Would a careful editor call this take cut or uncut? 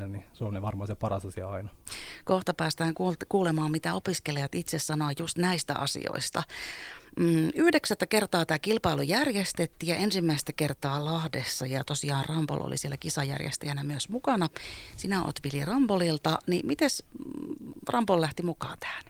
uncut